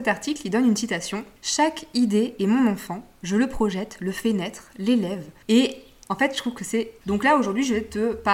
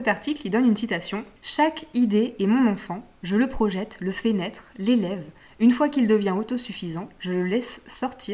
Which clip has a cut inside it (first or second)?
first